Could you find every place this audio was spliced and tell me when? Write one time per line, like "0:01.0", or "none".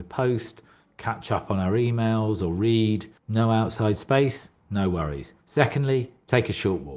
0:03.2
0:05.4